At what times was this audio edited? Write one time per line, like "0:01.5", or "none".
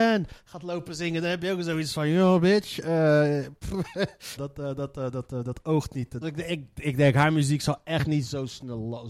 0:04.4
0:06.2